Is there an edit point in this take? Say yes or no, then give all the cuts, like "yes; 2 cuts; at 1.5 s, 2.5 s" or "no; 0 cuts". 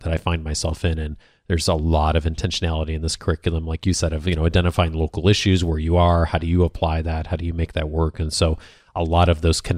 no; 0 cuts